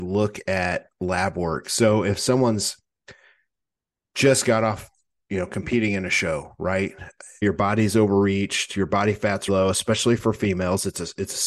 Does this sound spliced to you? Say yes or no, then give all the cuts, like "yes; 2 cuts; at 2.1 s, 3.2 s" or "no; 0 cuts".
yes; 2 cuts; at 7.4 s, 9.5 s